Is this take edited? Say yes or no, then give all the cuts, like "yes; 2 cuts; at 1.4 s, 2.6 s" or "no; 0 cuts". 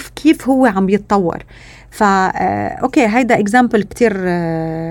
yes; 1 cut; at 3.8 s